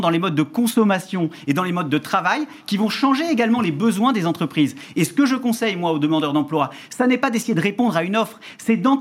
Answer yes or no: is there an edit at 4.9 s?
no